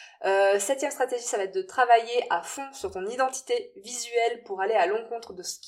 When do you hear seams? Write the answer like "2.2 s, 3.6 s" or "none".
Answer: none